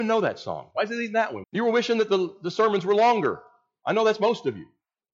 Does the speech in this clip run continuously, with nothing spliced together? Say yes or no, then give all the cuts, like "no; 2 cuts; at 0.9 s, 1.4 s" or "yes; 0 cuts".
no; 1 cut; at 1.4 s